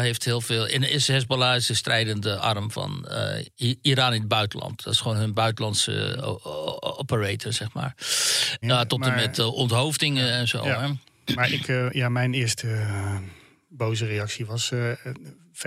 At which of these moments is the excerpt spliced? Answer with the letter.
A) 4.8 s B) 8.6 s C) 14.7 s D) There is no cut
B